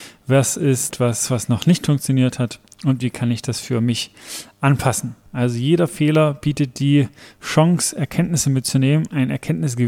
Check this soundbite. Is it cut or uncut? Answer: cut